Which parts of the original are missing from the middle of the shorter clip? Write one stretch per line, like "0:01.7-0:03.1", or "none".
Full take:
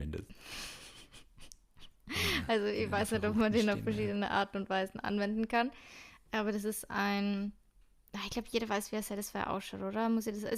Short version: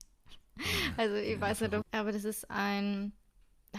0:03.3-0:06.2